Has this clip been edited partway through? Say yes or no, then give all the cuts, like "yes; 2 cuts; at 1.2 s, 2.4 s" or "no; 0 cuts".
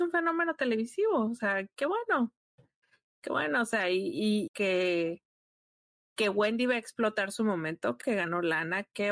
yes; 2 cuts; at 4.5 s, 8.0 s